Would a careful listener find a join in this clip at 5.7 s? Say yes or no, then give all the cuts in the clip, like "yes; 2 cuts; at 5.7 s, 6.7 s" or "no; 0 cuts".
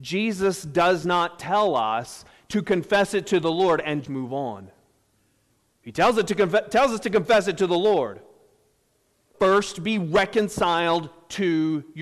no; 2 cuts; at 4.0 s, 9.3 s